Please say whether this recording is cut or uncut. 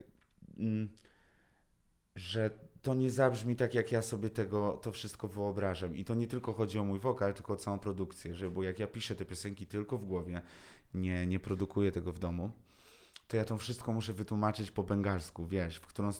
uncut